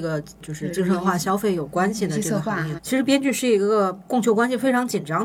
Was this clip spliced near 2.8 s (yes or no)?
yes